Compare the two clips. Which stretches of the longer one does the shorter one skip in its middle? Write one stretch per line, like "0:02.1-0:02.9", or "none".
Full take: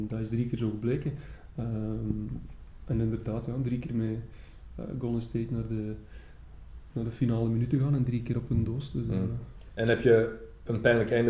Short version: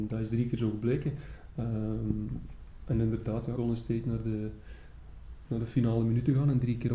0:03.6-0:05.0